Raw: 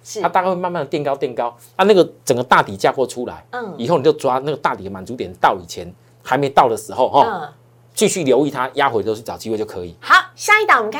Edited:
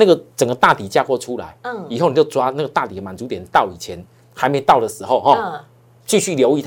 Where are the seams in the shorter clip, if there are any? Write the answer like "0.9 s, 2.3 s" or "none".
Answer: none